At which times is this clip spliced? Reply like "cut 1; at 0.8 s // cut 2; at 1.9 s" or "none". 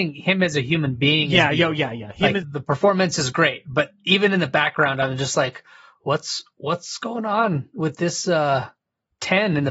cut 1; at 2.4 s